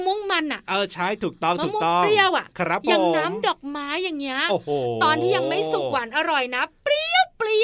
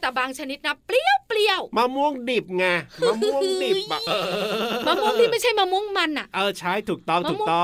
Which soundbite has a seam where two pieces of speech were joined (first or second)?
second